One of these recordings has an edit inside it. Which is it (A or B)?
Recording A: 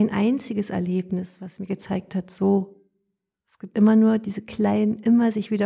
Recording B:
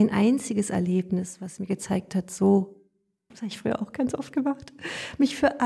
B